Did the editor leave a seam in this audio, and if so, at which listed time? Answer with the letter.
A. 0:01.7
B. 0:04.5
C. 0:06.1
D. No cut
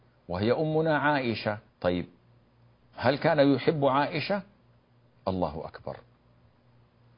A